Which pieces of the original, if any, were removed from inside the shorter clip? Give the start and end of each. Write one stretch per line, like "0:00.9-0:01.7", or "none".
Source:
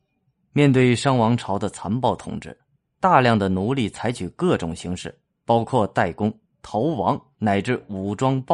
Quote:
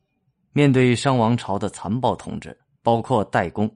0:02.8-0:05.4

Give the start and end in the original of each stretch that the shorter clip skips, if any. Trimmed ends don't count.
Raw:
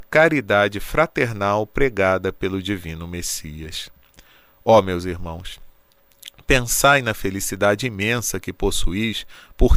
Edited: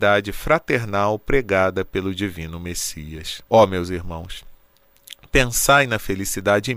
0:03.9-0:04.6

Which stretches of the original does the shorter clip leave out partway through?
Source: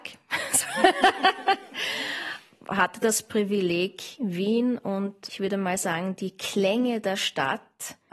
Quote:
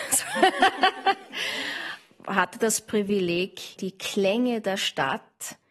0:04.2-0:06.2

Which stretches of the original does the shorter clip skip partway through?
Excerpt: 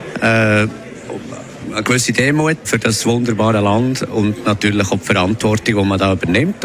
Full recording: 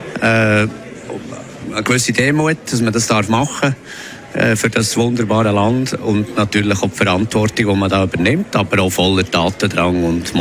0:02.6-0:04.6

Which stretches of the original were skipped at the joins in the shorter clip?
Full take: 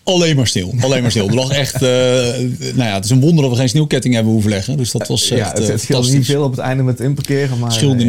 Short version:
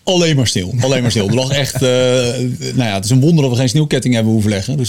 none

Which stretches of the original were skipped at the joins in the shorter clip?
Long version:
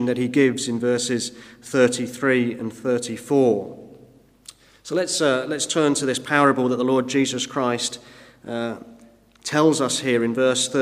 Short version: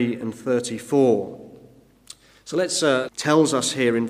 0:05.5-0:09.4

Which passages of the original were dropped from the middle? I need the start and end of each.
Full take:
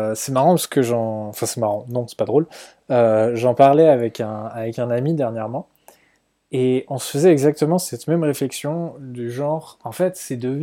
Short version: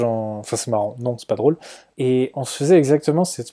0:02.8-0:06.5

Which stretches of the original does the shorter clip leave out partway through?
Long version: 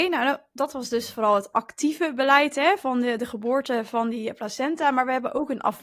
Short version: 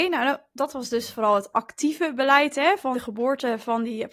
0:02.9-0:03.2

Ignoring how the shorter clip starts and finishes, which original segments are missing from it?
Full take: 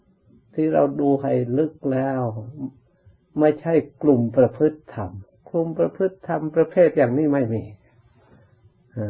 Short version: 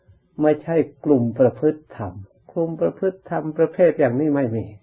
none

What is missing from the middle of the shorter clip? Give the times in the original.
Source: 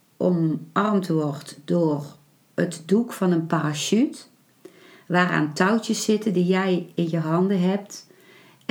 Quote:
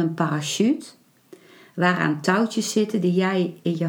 none

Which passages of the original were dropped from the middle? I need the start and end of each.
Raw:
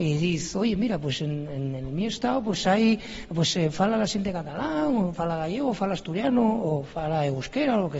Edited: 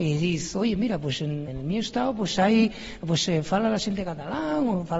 0:01.5-0:01.8

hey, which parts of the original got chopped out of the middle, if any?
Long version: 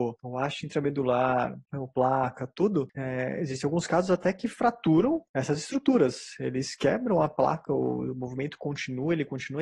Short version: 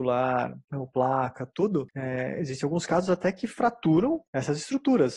none

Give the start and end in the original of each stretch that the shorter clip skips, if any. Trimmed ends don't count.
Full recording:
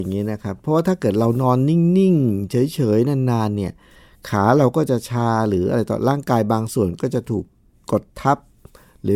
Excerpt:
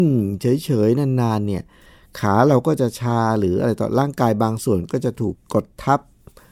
0:07.4-0:07.7

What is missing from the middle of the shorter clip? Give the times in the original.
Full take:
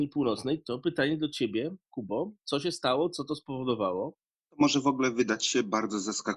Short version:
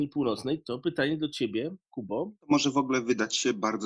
0:02.4-0:04.5

